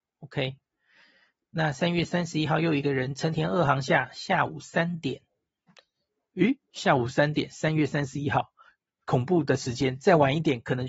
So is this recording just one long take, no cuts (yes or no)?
yes